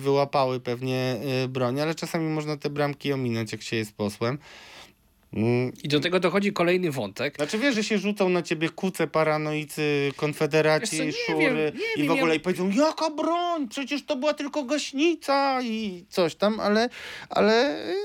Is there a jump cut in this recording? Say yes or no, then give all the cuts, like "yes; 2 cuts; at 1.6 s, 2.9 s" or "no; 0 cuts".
no; 0 cuts